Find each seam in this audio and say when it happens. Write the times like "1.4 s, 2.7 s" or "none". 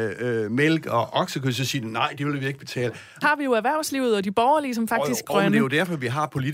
3.2 s, 5.2 s